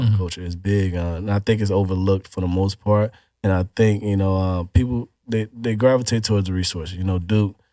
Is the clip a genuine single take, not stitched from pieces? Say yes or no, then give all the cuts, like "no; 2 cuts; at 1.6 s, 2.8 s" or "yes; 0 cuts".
yes; 0 cuts